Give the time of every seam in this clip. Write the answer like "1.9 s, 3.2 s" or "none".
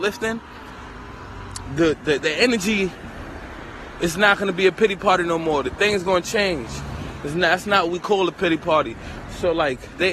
none